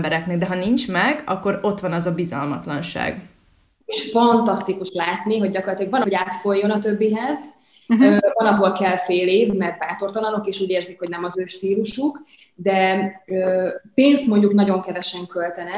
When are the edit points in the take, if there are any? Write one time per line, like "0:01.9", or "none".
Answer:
0:03.8
0:06.0